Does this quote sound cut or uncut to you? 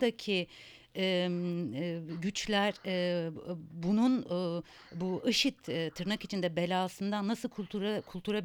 uncut